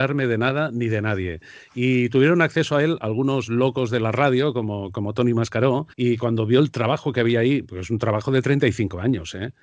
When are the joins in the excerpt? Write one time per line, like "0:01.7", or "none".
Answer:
0:05.9